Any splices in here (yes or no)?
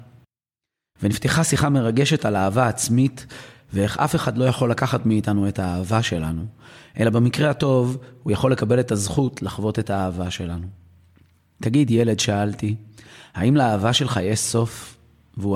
no